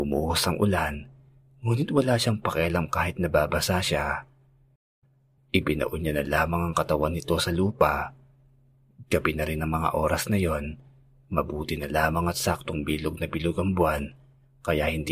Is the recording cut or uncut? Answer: cut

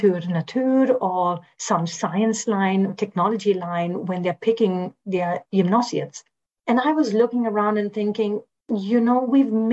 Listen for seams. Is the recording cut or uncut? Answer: cut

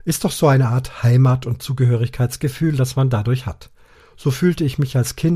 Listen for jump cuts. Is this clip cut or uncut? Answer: uncut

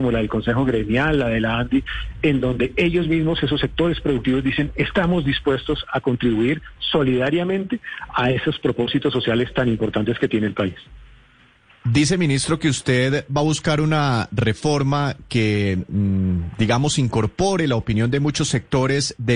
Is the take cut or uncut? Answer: uncut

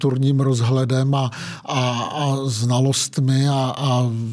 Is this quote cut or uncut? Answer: uncut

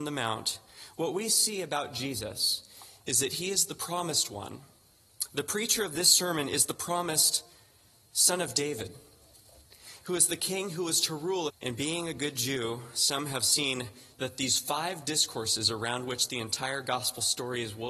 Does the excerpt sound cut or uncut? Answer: cut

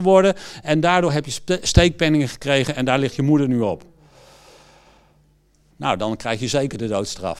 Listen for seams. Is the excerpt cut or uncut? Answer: cut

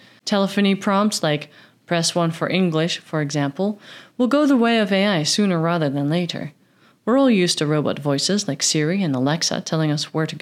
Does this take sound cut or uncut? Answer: uncut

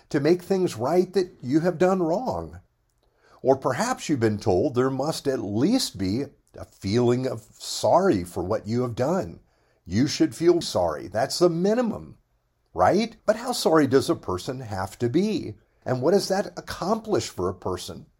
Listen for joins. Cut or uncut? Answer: cut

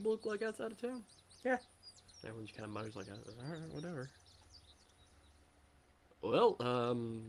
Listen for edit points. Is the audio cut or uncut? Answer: uncut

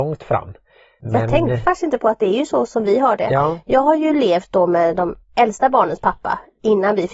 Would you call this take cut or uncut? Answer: uncut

